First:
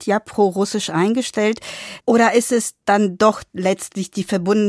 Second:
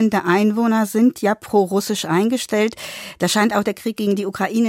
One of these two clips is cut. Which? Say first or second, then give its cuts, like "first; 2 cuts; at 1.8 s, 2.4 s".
first; 1 cut; at 2.0 s